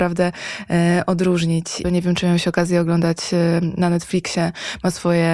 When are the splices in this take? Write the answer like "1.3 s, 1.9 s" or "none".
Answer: 1.8 s